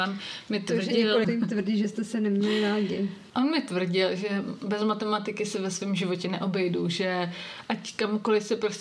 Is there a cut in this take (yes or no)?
yes